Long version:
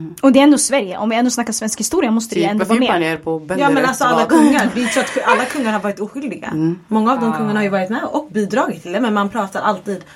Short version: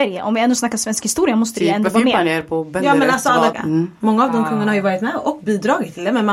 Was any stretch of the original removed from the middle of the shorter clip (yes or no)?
yes